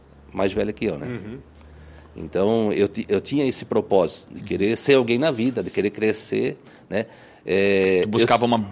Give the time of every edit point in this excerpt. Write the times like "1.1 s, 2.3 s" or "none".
none

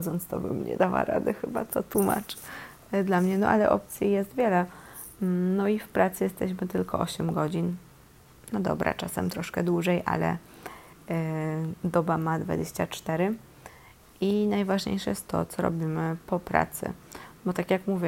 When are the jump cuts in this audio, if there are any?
none

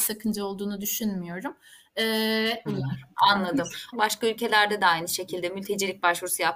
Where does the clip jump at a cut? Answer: 2.7 s, 3.9 s

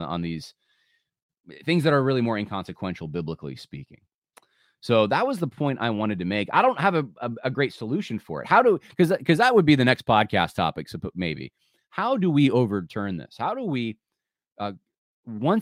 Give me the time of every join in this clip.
none

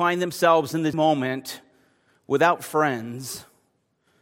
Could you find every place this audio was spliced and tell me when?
0.9 s

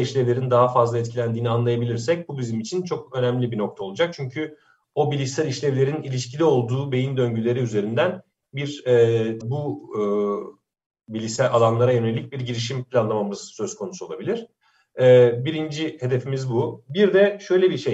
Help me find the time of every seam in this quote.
9.4 s

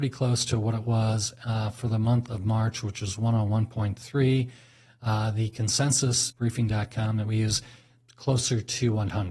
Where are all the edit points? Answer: 6.3 s

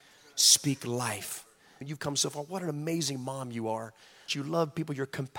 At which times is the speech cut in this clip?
1.8 s, 4.3 s

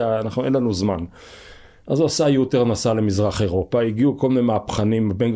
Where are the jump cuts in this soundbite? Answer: none

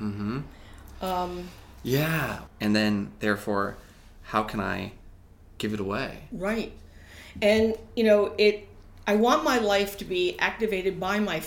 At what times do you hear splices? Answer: 2.5 s

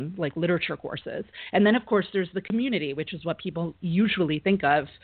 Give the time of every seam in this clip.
none

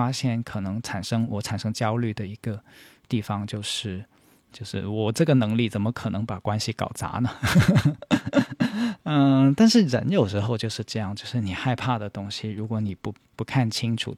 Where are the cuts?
4.5 s

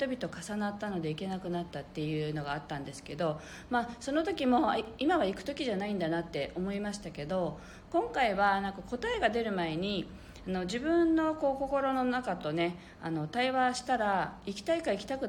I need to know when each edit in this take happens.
none

